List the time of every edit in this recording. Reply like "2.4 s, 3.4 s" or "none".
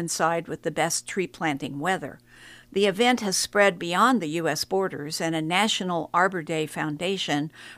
2.6 s